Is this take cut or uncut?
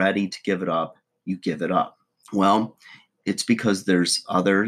cut